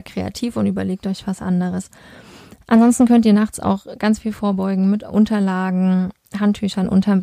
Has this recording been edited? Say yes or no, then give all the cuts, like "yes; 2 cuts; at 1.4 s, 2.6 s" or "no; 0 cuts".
no; 0 cuts